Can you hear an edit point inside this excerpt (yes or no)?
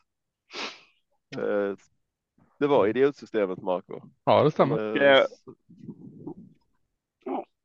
yes